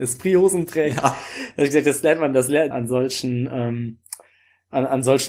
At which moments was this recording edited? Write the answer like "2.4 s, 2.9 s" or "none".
2.7 s